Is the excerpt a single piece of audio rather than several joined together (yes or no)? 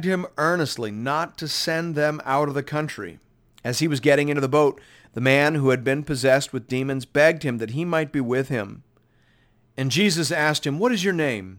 no